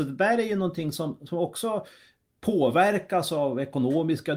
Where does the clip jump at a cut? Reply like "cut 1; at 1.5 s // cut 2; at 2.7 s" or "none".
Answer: none